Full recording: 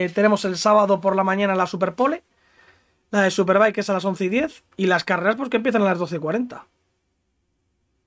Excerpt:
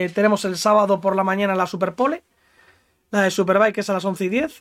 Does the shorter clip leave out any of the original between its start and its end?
no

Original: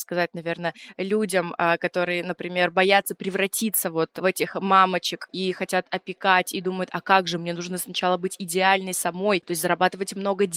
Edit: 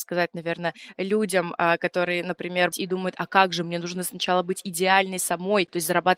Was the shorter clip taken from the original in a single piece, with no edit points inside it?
no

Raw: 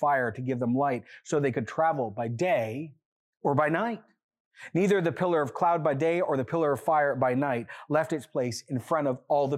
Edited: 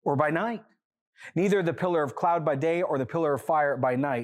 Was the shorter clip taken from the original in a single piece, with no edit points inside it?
yes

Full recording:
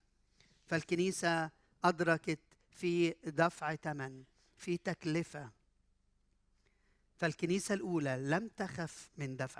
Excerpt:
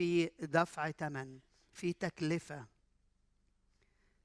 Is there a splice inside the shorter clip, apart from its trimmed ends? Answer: no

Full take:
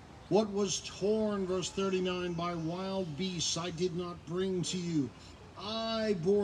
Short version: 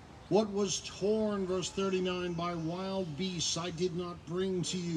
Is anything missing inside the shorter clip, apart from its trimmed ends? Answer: no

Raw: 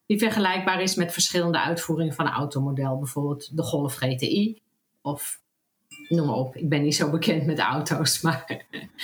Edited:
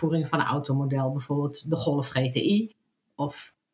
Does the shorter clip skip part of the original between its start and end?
no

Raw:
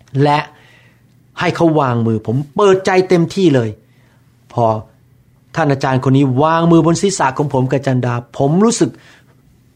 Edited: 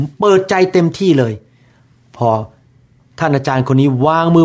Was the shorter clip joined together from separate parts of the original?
no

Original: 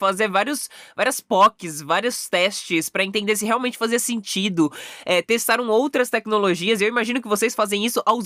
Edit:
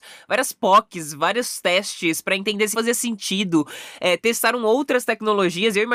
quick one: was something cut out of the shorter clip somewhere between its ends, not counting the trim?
yes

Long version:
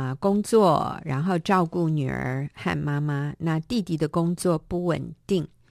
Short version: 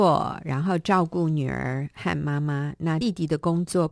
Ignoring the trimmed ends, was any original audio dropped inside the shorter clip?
yes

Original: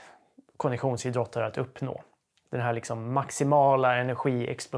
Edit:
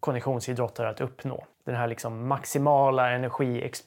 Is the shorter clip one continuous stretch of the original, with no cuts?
no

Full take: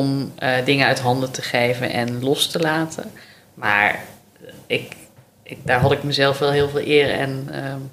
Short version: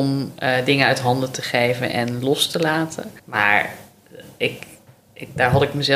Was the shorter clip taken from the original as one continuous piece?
no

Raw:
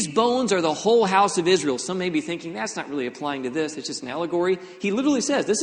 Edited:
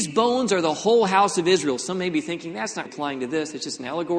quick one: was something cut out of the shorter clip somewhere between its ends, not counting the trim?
yes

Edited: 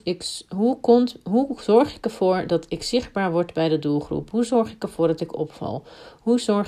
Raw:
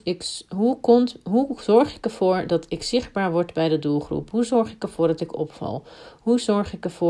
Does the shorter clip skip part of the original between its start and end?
no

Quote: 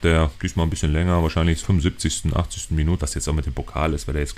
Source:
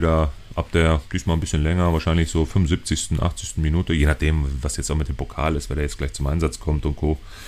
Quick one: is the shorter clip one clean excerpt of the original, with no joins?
no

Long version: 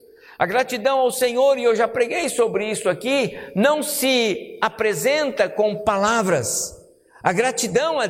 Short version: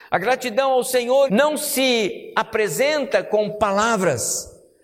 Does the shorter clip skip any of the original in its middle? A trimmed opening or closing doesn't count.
yes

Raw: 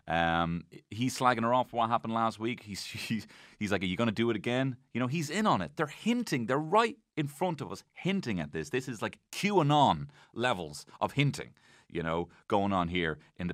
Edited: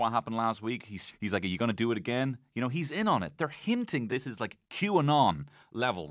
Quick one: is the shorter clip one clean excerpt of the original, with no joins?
no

